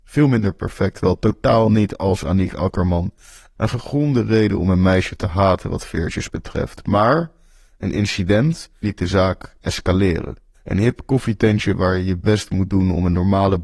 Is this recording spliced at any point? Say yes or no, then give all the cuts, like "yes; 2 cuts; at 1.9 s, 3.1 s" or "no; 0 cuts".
yes; 2 cuts; at 8.8 s, 10.5 s